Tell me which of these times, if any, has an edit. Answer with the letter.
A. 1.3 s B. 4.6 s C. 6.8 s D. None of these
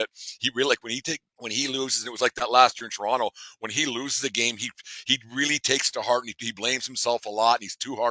A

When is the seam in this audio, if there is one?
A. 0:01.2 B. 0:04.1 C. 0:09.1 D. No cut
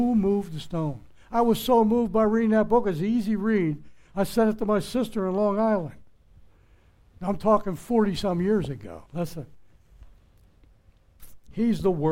C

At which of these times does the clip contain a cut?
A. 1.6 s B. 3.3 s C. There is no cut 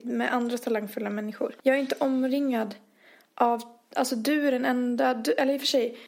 A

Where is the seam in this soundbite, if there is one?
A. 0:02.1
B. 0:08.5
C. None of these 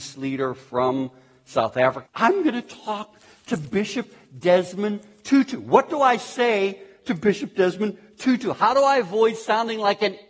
A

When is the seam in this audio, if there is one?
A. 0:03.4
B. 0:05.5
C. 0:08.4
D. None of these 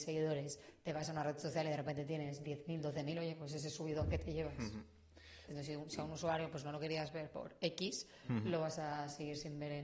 B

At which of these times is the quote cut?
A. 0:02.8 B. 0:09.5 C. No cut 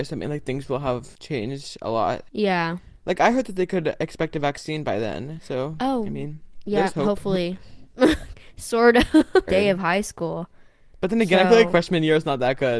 B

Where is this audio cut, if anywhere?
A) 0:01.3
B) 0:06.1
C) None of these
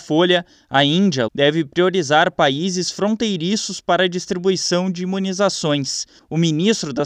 A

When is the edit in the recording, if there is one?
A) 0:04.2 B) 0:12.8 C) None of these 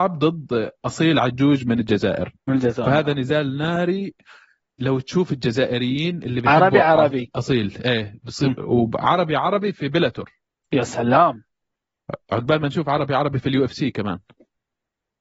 C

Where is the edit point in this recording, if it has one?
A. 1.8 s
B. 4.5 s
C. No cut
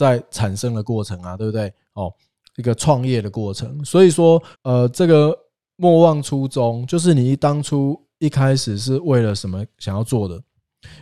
B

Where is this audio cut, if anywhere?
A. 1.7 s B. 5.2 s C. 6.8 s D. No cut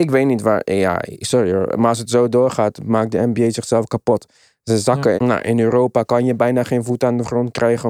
B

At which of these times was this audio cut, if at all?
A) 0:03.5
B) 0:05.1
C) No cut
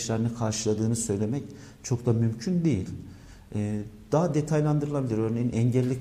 C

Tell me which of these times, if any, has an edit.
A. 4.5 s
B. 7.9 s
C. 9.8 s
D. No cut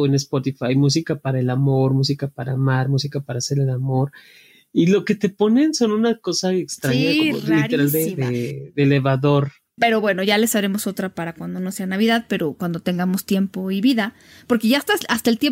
C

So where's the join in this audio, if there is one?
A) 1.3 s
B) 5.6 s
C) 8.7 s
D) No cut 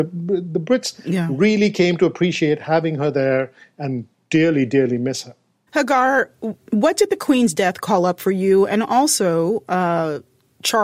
D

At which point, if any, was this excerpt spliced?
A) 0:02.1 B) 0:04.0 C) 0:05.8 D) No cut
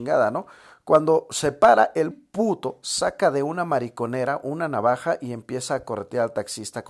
A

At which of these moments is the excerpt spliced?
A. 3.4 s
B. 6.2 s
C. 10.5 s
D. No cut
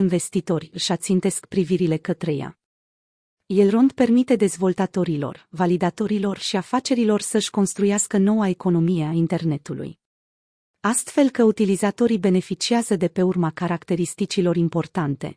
D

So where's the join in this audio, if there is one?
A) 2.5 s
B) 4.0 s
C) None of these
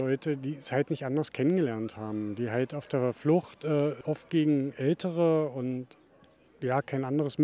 B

